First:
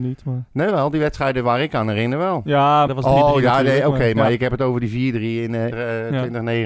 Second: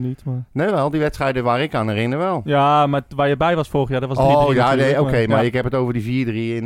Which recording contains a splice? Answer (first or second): first